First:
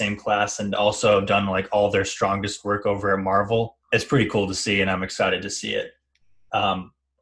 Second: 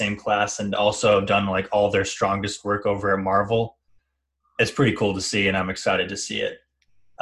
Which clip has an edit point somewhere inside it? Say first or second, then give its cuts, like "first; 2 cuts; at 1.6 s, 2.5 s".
first; 1 cut; at 3.8 s